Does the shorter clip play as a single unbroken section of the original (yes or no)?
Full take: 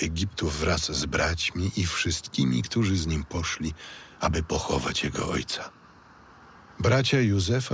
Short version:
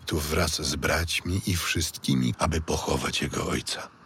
no